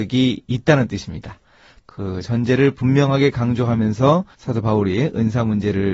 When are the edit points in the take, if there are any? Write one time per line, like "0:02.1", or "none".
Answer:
0:01.8
0:04.3